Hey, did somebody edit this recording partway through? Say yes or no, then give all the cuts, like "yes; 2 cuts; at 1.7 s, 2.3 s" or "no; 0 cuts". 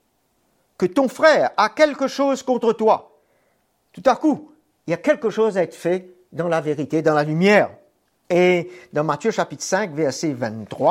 yes; 1 cut; at 8.2 s